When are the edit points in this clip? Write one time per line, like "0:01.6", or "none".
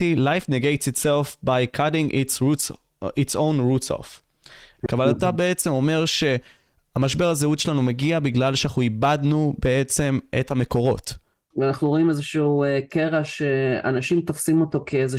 0:04.9
0:11.5